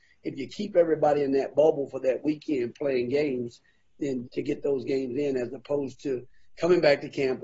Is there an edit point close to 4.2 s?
yes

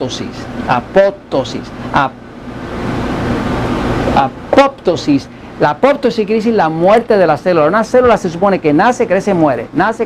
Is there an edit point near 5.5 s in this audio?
no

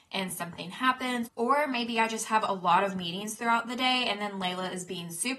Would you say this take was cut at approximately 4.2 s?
no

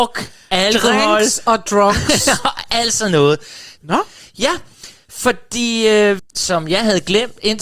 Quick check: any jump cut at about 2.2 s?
no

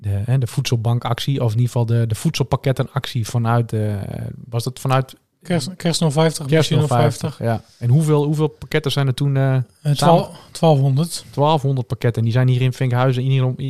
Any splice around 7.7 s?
no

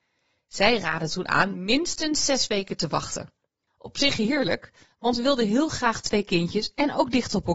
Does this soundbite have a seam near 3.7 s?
yes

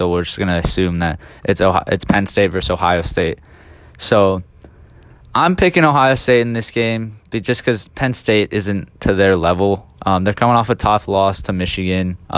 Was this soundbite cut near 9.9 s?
yes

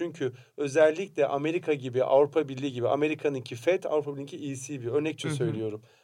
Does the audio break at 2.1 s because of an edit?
no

